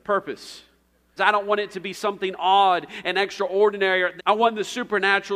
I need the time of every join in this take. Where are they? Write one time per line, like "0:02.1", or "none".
0:01.2
0:04.2